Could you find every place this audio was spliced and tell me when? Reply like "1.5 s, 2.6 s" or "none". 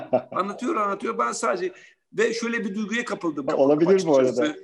3.5 s